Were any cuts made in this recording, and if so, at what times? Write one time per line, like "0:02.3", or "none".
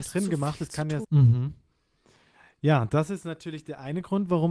0:01.0